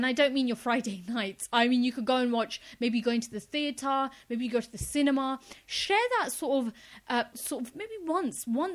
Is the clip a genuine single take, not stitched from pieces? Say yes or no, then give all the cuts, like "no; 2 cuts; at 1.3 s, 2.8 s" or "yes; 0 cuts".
no; 1 cut; at 7.3 s